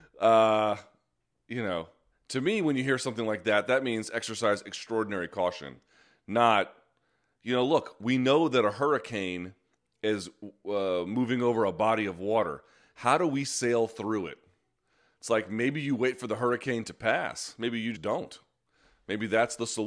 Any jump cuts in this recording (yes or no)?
yes